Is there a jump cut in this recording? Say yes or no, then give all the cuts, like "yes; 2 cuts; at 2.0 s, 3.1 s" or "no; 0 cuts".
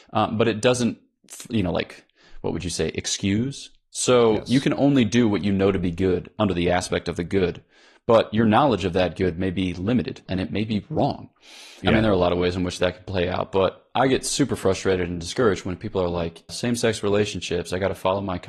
yes; 3 cuts; at 10.3 s, 11.8 s, 16.5 s